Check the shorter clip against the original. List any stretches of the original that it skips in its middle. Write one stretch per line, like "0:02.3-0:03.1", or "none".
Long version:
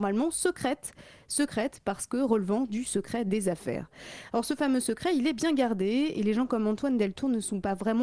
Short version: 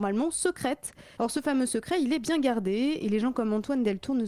0:01.2-0:04.3